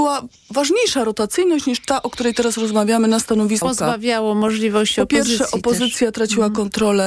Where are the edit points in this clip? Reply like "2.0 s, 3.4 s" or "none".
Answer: 3.6 s